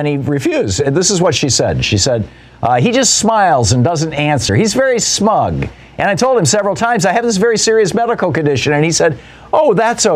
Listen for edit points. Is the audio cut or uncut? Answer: uncut